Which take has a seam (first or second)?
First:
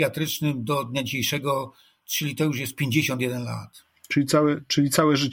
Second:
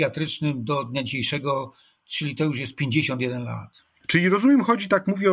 second